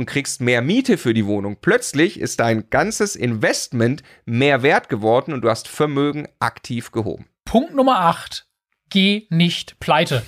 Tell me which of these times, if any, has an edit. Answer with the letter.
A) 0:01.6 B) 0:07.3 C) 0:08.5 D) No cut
D